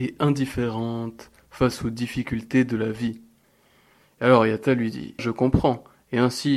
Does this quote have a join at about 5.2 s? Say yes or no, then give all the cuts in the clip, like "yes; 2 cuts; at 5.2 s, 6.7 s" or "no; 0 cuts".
yes; 1 cut; at 5.2 s